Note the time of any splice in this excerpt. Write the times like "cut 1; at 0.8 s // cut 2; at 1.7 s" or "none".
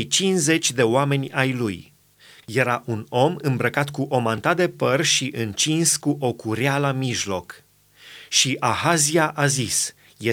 cut 1; at 2.4 s